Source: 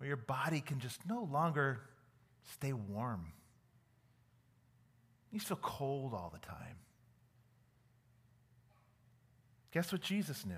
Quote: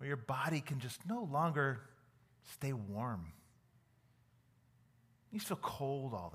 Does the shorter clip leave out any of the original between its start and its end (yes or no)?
no